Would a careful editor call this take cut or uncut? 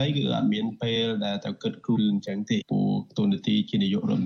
cut